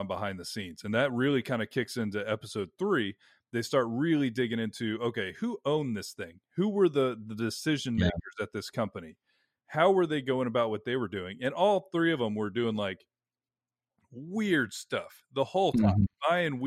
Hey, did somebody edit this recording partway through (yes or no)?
no